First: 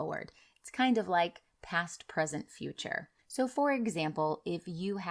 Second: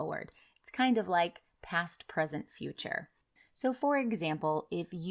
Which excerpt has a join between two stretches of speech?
first; 1 cut; at 3.2 s

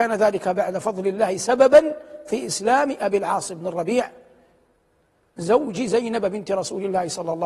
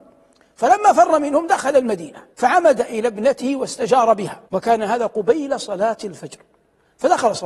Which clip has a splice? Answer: second; 2 cuts; at 2.3 s, 4.5 s

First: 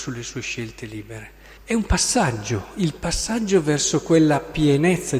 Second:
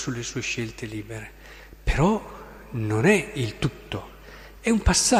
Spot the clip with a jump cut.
first; 1 cut; at 1.6 s

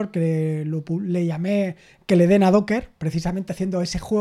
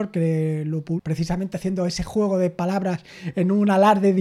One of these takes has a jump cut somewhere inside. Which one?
second; 1 cut; at 1.0 s

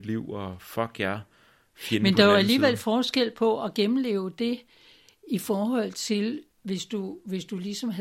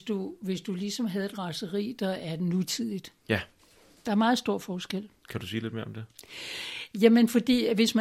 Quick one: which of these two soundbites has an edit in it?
first; 1 cut; at 6.5 s

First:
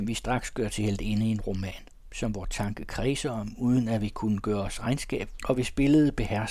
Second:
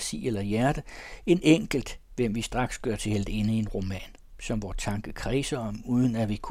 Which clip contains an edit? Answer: first; 1 cut; at 5.4 s

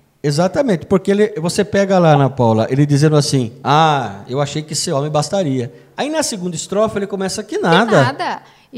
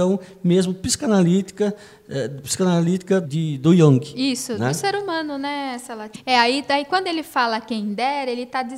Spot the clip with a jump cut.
second; 2 cuts; at 3.2 s, 6.1 s

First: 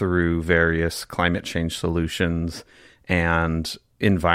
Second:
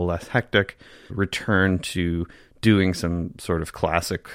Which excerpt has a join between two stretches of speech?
second; 1 cut; at 1.1 s

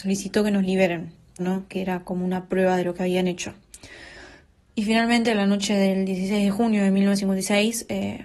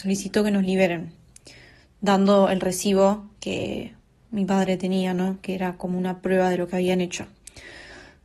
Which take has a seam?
first; 1 cut; at 1.4 s

